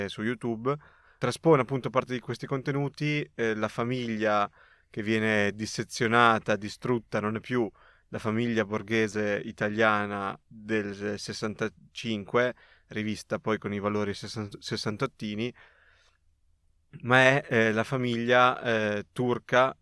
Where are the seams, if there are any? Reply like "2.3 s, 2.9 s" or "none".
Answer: none